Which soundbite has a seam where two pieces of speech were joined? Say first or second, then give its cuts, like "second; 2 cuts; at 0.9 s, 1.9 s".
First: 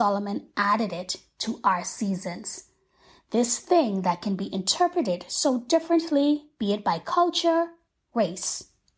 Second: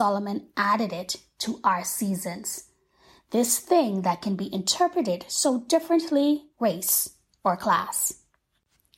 second; 1 cut; at 6.5 s